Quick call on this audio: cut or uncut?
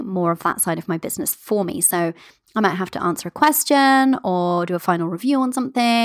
uncut